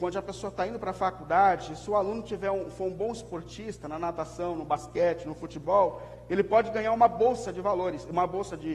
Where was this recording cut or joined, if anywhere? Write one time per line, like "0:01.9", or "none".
none

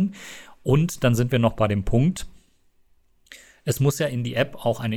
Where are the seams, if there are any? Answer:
none

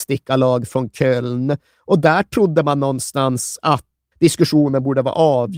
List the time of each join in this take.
0:04.1

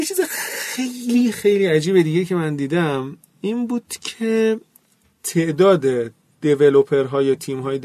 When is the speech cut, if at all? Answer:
0:01.3

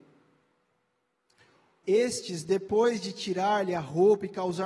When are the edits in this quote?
0:01.8

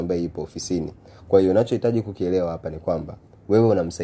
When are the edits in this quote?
none

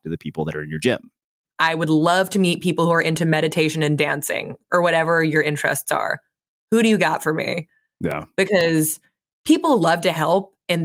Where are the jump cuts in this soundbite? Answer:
0:01.4

